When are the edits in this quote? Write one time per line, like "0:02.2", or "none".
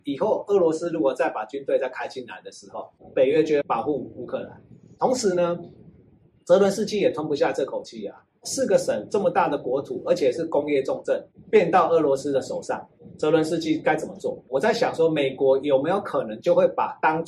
none